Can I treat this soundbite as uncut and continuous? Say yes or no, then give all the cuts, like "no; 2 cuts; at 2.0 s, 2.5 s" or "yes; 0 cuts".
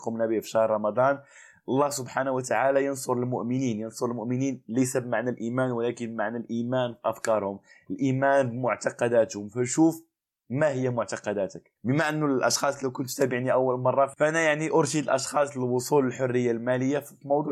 no; 1 cut; at 11.8 s